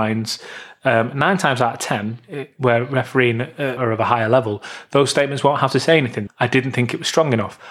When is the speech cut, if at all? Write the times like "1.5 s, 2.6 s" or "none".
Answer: 3.8 s, 6.3 s